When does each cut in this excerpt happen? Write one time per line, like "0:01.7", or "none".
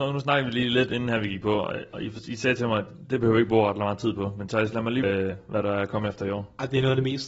0:05.0

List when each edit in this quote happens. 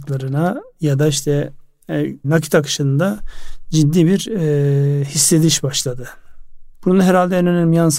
0:02.2
0:06.7

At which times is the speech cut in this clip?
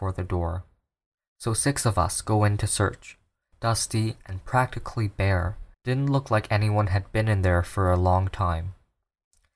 0:03.5
0:05.7

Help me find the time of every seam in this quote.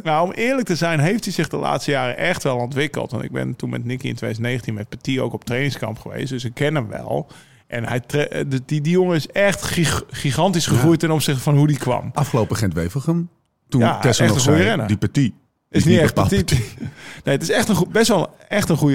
none

